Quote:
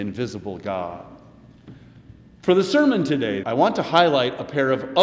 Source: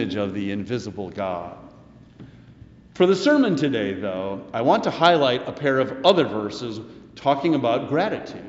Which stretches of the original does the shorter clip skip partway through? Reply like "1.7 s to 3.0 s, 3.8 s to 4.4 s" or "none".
3.9 s to 4.5 s

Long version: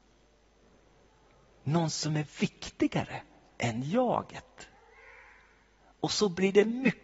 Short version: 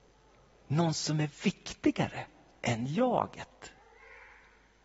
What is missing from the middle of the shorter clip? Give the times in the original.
none

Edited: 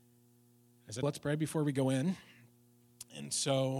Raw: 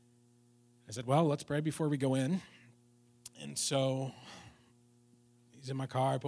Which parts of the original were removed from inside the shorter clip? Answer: 1.0 s to 1.3 s

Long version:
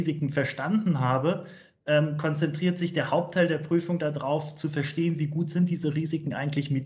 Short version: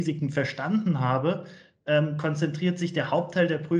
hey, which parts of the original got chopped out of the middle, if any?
none

